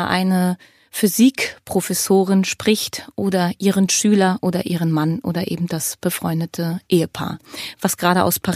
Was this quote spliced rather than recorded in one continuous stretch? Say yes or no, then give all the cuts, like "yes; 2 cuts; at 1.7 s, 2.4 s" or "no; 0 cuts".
no; 0 cuts